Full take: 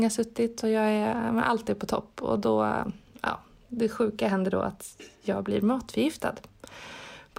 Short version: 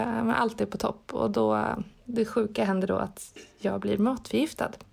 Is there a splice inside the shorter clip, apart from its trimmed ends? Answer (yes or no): yes